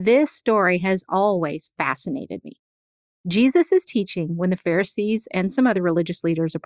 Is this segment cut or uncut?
uncut